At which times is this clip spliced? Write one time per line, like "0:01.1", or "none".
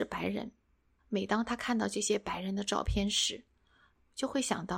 0:01.0